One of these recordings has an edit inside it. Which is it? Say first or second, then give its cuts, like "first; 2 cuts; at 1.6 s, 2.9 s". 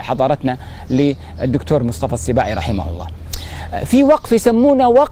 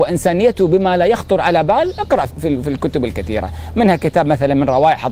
second; 1 cut; at 2.3 s